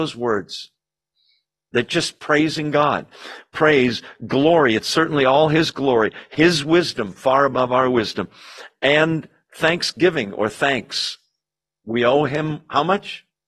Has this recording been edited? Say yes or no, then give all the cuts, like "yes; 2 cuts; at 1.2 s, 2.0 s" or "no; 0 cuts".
no; 0 cuts